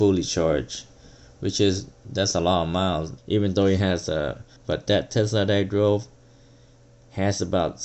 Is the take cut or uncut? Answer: cut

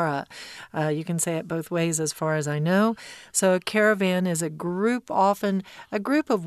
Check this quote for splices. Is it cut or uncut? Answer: cut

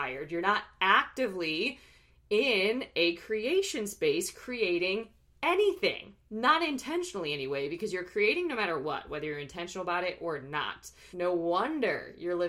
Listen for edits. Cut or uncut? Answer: cut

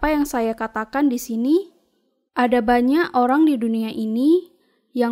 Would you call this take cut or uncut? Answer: cut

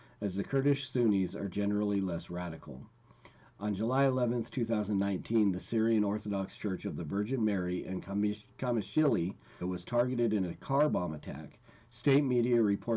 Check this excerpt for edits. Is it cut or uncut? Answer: cut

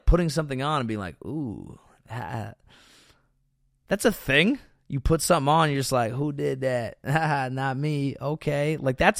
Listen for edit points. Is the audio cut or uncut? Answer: uncut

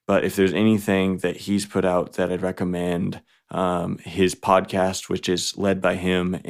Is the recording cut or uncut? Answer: uncut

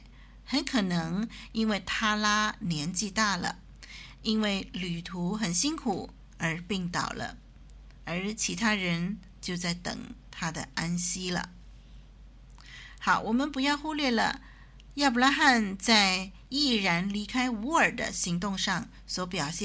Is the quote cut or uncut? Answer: uncut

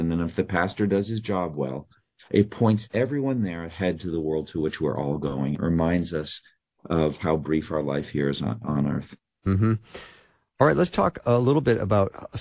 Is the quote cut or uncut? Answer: uncut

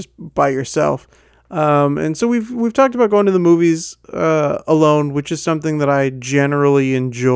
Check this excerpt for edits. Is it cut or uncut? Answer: uncut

